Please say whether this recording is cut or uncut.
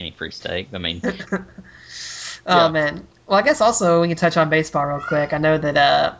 uncut